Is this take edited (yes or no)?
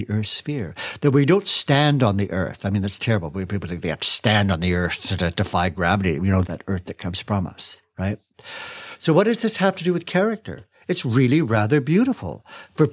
yes